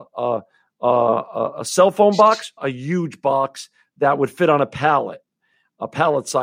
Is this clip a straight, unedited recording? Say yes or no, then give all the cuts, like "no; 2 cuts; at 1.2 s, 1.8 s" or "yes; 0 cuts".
no; 1 cut; at 2.6 s